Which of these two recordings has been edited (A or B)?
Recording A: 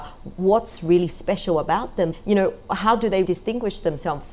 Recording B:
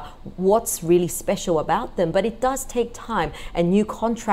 A